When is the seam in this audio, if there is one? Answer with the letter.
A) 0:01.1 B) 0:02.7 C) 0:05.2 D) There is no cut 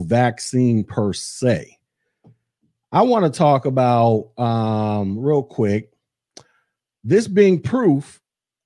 D